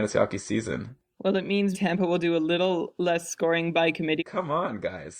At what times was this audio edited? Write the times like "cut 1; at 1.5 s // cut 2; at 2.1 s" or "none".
cut 1; at 1.7 s // cut 2; at 4.2 s